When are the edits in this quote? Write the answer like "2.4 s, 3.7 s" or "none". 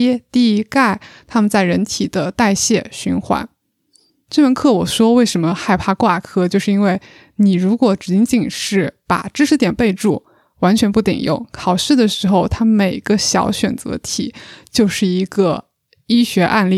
none